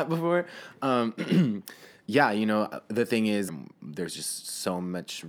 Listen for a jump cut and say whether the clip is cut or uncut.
cut